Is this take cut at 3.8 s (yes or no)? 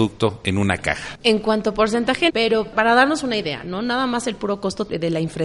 no